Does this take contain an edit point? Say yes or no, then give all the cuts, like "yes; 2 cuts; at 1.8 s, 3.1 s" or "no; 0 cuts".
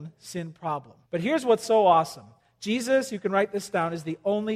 yes; 1 cut; at 1.0 s